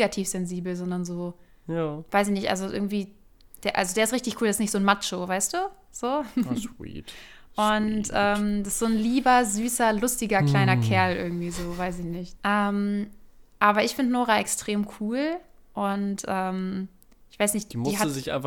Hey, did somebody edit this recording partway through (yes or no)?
yes